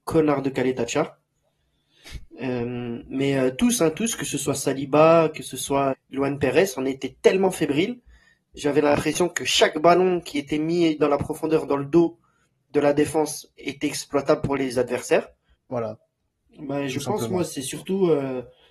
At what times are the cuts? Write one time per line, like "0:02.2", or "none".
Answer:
0:05.9
0:15.5